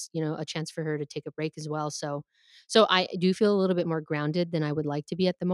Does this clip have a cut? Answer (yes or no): no